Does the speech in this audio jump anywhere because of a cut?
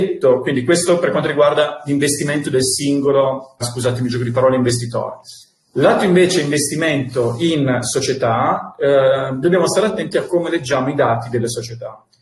yes; 1 cut; at 3.6 s

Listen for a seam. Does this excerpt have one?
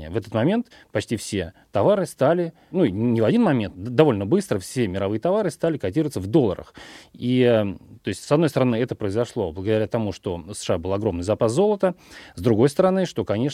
no; 0 cuts

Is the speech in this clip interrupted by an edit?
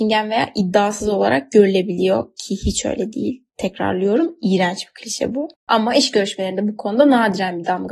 yes; 1 cut; at 5.6 s

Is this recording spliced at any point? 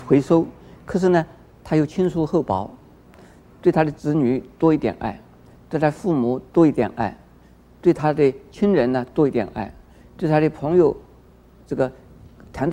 no; 0 cuts

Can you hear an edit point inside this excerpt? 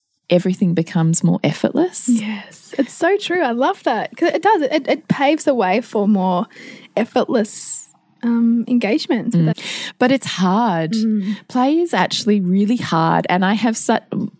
yes; 1 cut; at 9.5 s

